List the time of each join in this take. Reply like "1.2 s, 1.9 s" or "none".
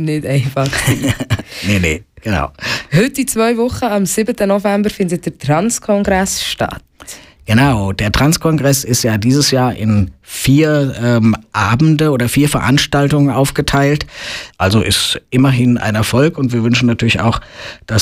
14.5 s